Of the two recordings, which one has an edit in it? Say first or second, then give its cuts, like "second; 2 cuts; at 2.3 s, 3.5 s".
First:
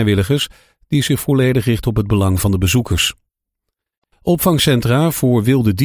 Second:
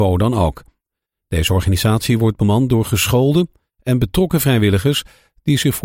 first; 1 cut; at 4.1 s